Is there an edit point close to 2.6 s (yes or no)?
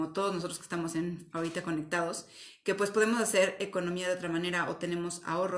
no